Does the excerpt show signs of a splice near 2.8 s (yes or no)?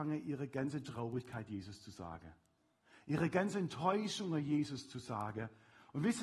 no